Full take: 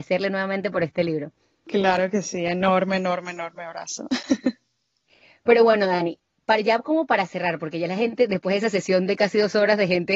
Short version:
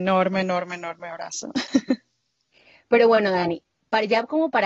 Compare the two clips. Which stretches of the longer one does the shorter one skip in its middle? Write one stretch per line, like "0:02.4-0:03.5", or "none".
none